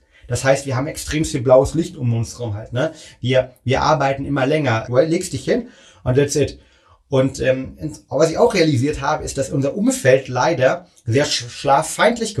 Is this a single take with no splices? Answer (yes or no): no